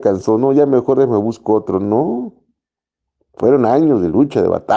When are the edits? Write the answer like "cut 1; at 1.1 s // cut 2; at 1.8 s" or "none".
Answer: none